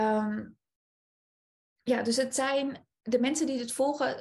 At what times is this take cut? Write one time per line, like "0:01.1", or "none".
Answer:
none